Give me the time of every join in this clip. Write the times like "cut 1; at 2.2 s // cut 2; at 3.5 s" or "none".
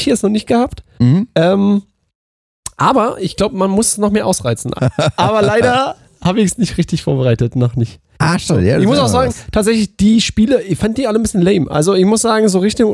cut 1; at 4.8 s